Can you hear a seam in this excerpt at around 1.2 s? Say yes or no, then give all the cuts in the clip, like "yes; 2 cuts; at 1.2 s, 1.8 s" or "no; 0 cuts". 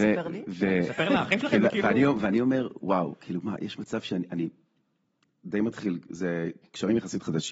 yes; 1 cut; at 1.2 s